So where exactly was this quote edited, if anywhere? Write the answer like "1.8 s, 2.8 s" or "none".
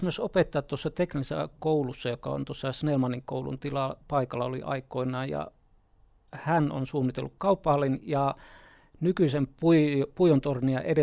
none

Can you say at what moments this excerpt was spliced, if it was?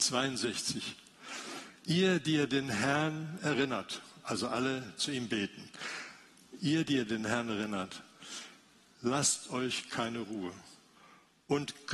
5.0 s

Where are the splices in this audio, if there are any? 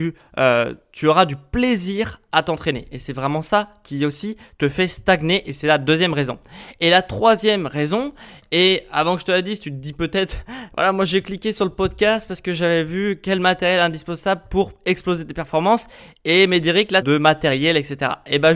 10.7 s, 17.0 s

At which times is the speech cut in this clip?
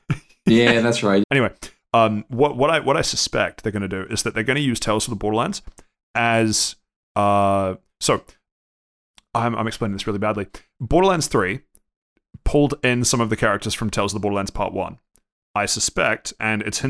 1.2 s

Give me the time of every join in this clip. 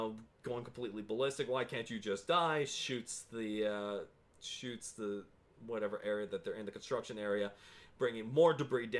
none

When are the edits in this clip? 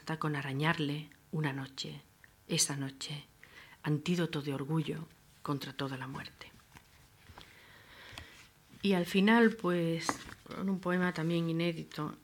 8.8 s

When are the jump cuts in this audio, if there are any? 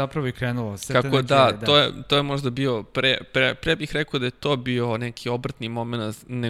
none

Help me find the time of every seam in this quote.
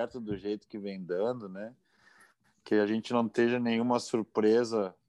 none

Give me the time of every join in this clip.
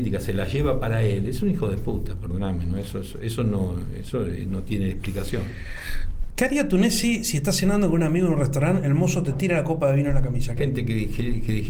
6.3 s, 10.6 s

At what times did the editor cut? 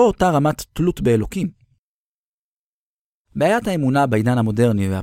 3.2 s

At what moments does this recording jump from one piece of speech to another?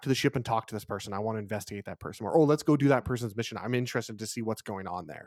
none

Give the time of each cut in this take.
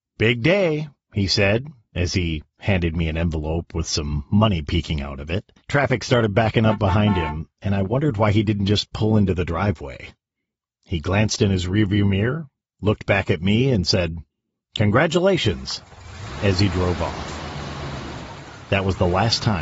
5.6 s

